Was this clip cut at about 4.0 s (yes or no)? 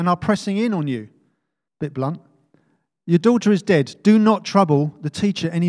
no